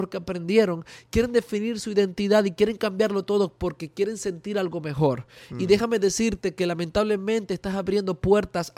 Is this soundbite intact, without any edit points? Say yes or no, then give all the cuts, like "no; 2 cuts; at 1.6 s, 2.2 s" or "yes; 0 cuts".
yes; 0 cuts